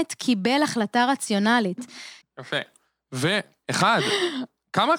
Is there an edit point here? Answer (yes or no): yes